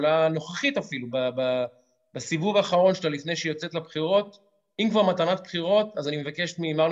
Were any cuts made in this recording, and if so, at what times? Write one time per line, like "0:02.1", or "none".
0:01.1